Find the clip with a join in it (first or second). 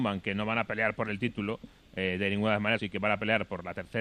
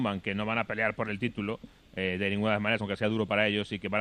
first